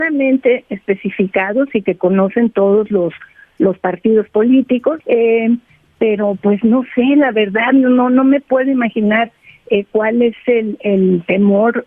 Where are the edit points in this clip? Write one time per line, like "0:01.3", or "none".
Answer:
0:05.0